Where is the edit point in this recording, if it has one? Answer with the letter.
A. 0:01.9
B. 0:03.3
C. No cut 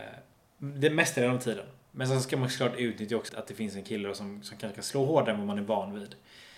B